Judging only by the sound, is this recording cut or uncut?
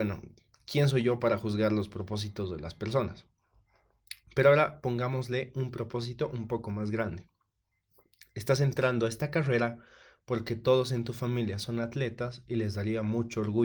uncut